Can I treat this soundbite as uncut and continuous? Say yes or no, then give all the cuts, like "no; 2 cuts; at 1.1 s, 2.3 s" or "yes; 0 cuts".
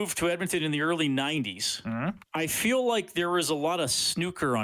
no; 1 cut; at 2.3 s